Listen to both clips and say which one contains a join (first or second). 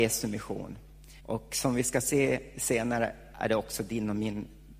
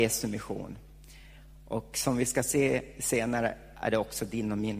first